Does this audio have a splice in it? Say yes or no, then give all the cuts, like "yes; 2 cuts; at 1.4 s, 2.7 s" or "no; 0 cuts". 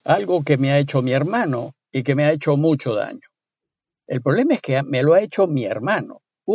no; 0 cuts